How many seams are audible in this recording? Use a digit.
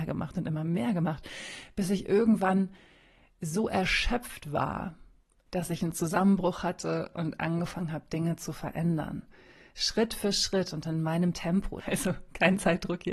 1